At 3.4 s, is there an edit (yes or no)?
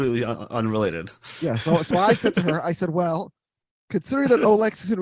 no